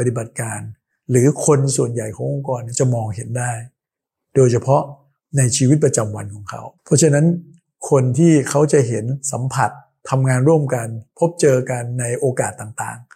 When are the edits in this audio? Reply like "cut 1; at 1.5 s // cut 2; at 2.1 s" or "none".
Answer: cut 1; at 6.8 s